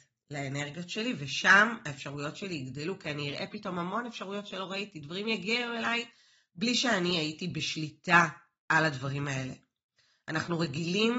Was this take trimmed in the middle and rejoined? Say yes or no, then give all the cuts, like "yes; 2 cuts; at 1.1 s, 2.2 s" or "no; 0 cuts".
no; 0 cuts